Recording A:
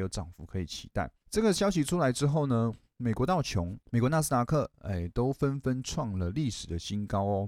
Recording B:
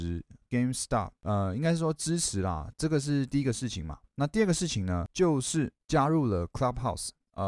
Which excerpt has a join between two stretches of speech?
B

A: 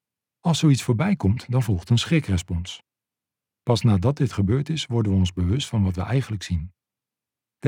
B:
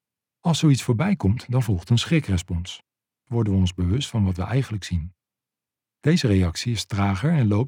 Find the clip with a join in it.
B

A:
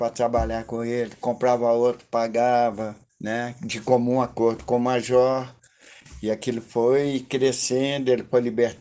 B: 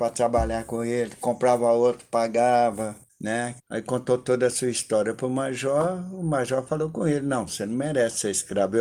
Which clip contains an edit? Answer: B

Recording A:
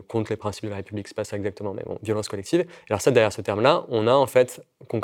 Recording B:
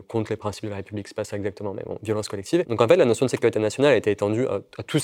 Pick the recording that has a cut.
B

